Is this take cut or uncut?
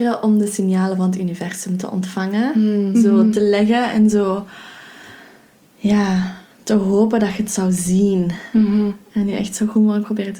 cut